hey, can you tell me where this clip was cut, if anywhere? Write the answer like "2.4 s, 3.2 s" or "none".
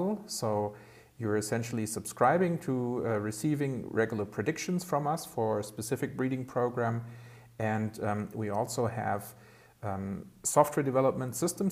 none